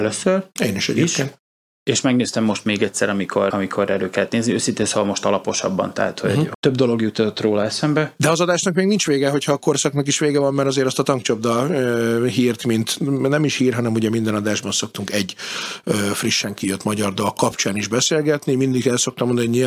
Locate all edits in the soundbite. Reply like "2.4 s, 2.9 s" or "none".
3.5 s, 6.5 s, 8.2 s